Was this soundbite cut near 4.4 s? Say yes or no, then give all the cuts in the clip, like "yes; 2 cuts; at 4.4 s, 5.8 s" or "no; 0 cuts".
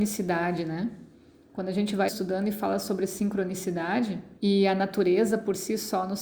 yes; 2 cuts; at 2.1 s, 4.4 s